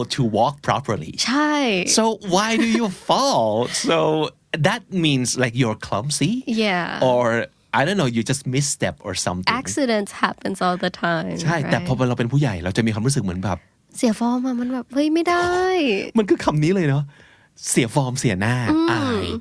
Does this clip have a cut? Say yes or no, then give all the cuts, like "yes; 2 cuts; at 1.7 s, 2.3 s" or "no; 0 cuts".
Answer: no; 0 cuts